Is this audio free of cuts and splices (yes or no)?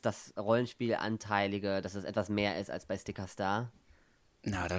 yes